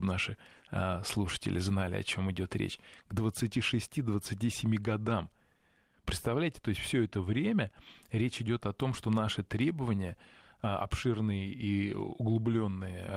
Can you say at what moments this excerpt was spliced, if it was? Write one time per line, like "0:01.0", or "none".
none